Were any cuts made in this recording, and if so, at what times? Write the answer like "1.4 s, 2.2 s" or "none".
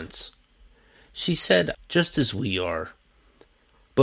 1.7 s